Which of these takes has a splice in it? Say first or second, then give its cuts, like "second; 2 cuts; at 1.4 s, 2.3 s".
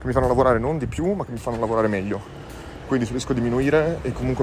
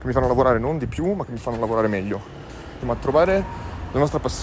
second; 1 cut; at 2.8 s